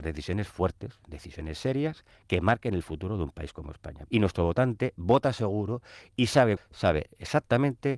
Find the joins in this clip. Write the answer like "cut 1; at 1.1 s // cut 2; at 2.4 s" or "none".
cut 1; at 4.1 s // cut 2; at 6.6 s

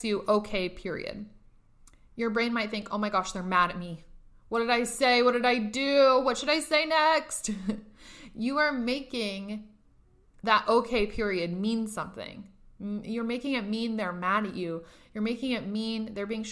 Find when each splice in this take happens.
none

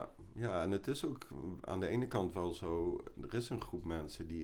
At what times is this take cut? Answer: none

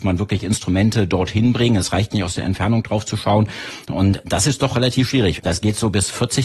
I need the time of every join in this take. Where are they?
cut 1; at 5.4 s

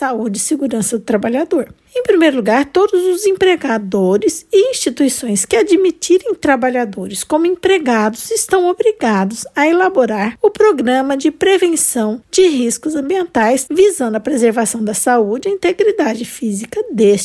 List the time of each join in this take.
cut 1; at 1.9 s // cut 2; at 13.7 s

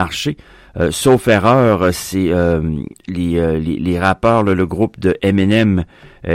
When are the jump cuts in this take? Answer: none

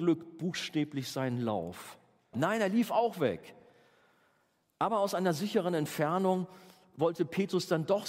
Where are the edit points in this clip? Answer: cut 1; at 2.3 s

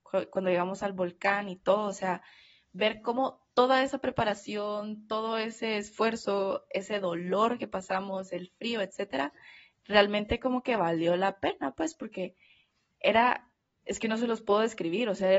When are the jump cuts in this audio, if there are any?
none

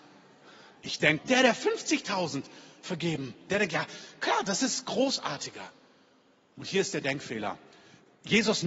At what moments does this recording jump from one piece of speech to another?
cut 1; at 1.2 s // cut 2; at 3.5 s

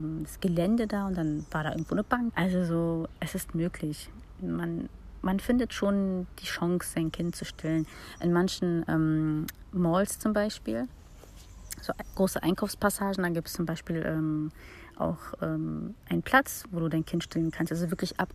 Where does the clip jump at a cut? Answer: cut 1; at 2.3 s

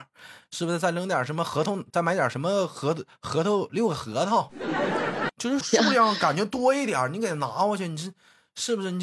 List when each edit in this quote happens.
cut 1; at 5.6 s

